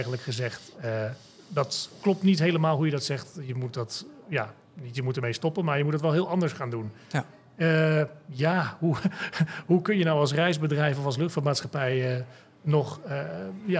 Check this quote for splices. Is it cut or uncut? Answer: uncut